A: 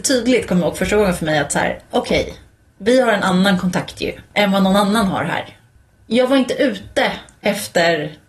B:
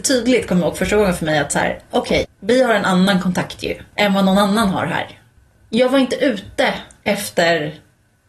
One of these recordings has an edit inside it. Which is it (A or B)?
B